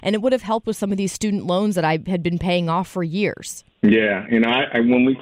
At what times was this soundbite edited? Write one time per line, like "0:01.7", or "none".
0:03.7